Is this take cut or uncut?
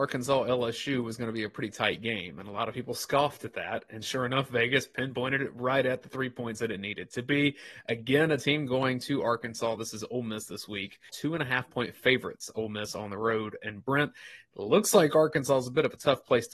cut